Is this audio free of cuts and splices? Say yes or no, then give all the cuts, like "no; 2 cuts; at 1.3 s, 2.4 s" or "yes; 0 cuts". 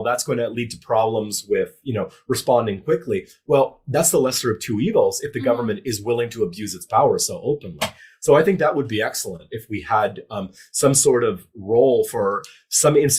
yes; 0 cuts